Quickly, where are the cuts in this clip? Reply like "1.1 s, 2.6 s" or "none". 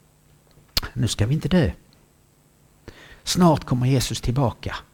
3.1 s